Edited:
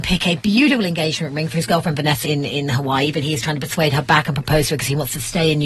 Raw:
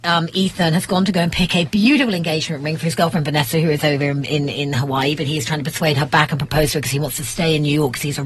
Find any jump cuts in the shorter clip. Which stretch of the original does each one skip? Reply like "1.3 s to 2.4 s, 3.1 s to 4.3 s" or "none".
3.5 s to 4.3 s